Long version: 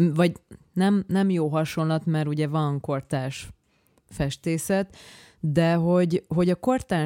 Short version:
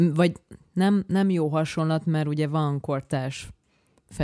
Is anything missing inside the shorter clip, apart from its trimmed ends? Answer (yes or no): no